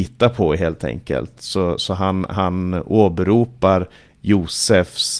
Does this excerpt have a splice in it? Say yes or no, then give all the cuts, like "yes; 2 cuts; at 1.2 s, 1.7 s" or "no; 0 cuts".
no; 0 cuts